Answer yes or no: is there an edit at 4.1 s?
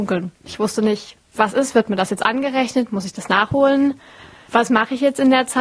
no